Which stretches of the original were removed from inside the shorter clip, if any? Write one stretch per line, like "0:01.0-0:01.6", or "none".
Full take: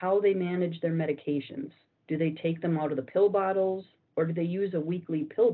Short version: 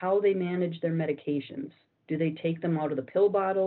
none